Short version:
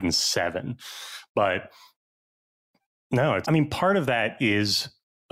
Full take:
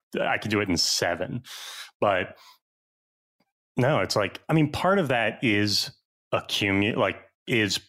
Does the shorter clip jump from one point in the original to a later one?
yes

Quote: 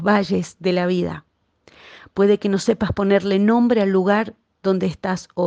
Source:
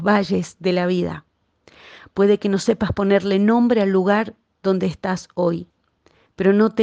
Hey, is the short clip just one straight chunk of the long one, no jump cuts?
yes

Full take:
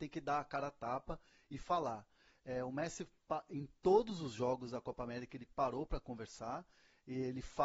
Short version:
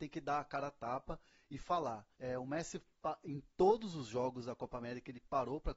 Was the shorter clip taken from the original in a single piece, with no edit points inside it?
no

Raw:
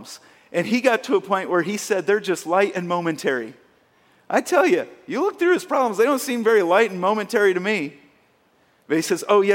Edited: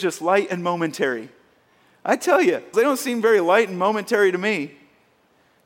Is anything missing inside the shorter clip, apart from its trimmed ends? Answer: yes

